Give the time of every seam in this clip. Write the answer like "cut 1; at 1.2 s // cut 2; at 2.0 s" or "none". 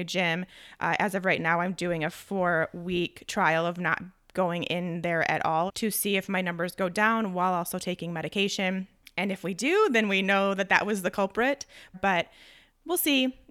cut 1; at 5.7 s // cut 2; at 11.9 s

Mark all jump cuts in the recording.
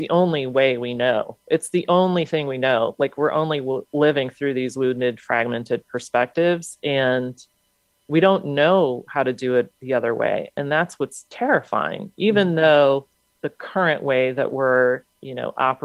none

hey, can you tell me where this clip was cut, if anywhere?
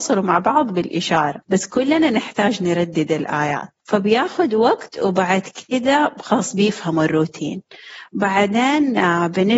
cut 1; at 1.4 s // cut 2; at 3.8 s

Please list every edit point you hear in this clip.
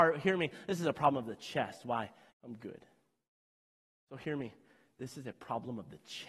cut 1; at 2.3 s

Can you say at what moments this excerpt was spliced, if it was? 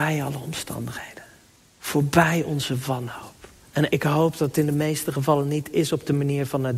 cut 1; at 3.9 s

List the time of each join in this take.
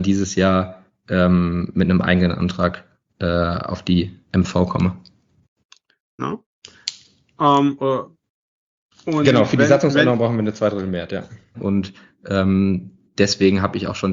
cut 1; at 6.2 s // cut 2; at 11.5 s

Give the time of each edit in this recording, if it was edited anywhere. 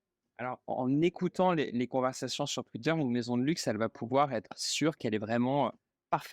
none

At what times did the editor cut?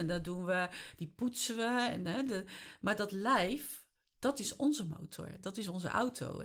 none

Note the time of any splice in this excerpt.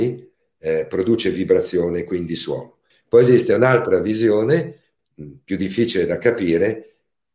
cut 1; at 2.9 s // cut 2; at 5.0 s

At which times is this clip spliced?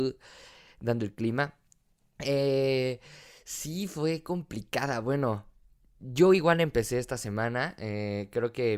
none

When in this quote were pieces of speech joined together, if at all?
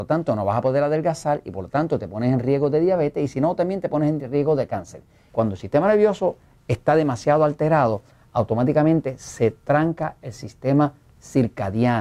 cut 1; at 5.3 s

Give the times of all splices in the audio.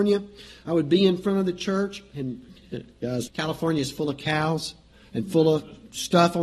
cut 1; at 3.3 s

